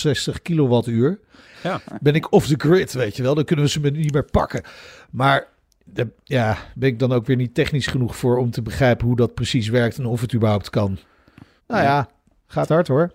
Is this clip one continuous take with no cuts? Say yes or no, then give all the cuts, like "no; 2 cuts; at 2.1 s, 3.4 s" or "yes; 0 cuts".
no; 2 cuts; at 1.5 s, 11.6 s